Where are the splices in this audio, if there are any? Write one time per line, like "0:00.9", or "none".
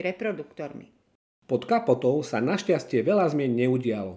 none